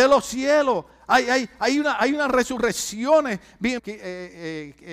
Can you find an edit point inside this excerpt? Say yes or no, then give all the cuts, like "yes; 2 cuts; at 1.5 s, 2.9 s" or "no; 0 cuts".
yes; 1 cut; at 3.8 s